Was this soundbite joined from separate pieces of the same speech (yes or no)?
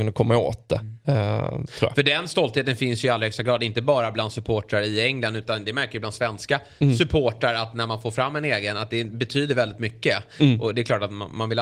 no